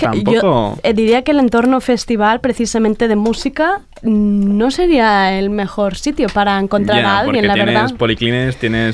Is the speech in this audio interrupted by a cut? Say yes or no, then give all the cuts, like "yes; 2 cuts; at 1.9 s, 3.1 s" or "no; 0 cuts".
no; 0 cuts